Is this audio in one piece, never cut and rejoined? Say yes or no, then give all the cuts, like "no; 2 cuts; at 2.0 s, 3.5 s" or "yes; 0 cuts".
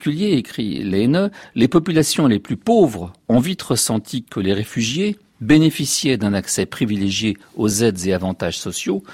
yes; 0 cuts